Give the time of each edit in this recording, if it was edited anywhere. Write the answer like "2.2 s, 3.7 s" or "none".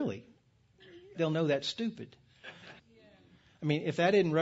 1.1 s, 2.8 s